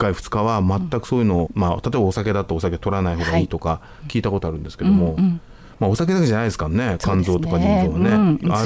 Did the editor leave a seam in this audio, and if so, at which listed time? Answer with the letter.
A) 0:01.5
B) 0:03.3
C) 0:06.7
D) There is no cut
A